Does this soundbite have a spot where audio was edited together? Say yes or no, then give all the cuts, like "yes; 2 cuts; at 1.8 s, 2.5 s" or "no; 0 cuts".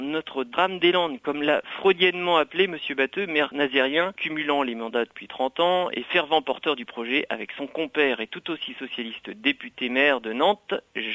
no; 0 cuts